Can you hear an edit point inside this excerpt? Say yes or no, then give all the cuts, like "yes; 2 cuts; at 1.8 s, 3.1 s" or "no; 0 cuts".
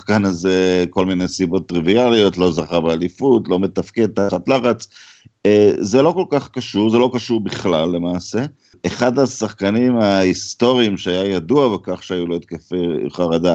no; 0 cuts